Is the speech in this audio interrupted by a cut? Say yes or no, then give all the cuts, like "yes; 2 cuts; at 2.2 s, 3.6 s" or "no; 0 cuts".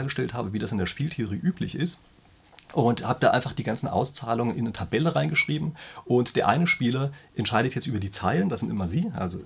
no; 0 cuts